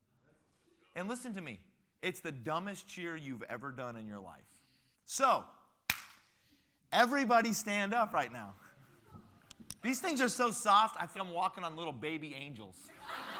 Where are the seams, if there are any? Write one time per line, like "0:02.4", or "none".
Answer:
0:04.9
0:09.8
0:11.1